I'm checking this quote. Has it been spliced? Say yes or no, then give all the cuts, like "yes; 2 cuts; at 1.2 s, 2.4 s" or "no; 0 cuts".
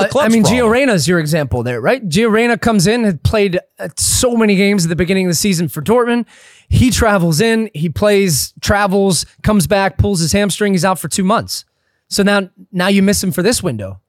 no; 0 cuts